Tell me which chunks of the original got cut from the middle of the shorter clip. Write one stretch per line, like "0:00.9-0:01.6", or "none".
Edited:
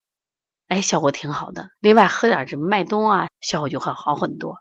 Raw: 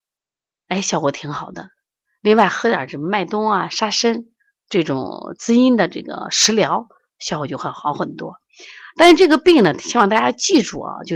0:01.8-0:02.2
0:03.7-0:07.1